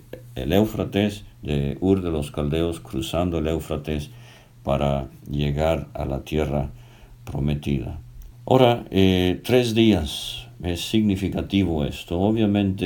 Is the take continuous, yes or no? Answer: no